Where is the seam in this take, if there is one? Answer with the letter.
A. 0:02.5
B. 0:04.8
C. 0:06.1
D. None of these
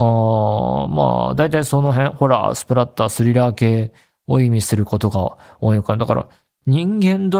D